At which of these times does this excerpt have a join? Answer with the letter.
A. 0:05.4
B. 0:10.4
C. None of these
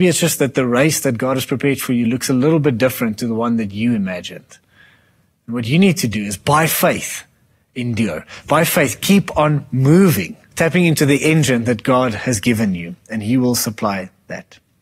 B